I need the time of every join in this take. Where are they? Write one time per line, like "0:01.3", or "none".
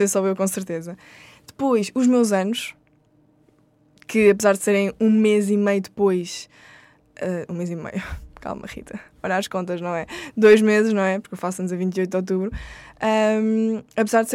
none